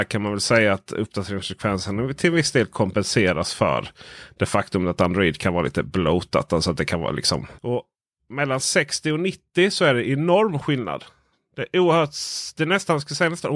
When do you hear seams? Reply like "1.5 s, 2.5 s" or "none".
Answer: 7.6 s

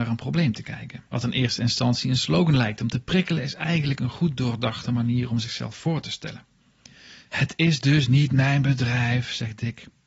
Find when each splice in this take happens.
1.1 s, 7.3 s

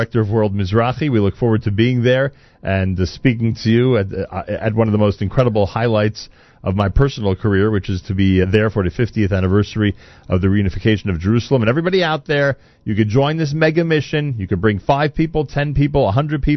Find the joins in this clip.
8.4 s

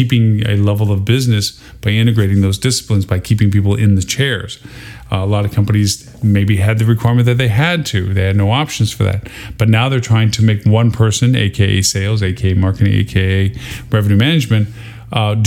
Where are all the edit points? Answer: none

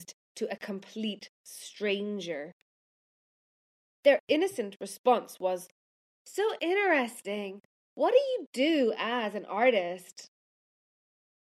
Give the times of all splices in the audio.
6.1 s, 7.8 s

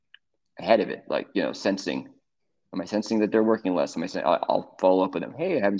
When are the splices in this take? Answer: none

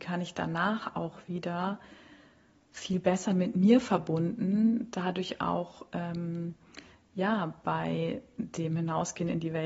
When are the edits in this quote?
none

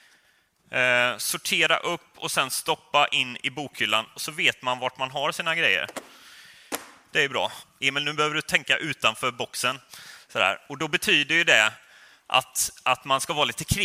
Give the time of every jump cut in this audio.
7.6 s

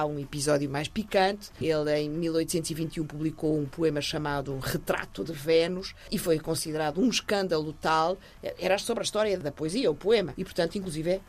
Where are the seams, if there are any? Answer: 10.4 s

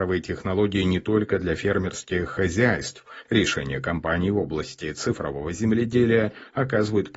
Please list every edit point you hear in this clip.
3.2 s

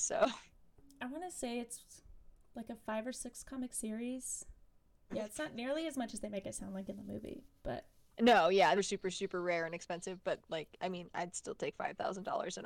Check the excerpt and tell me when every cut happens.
5.1 s, 8.8 s

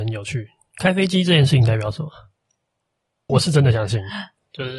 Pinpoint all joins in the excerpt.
3.3 s

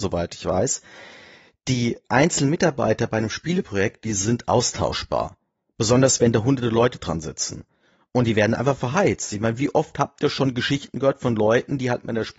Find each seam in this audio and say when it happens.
none

